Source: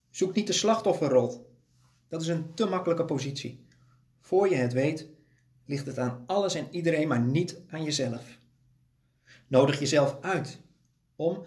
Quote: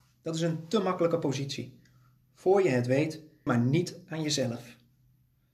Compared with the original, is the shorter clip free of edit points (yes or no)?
no